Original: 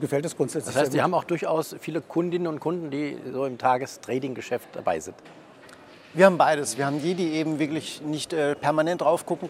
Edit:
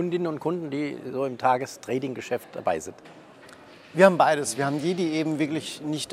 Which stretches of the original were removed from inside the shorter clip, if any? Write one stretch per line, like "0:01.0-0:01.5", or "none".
none